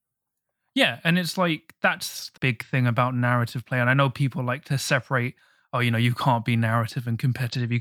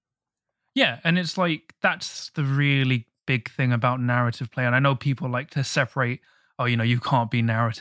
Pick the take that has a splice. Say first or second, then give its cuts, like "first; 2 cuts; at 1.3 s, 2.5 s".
first; 1 cut; at 2.4 s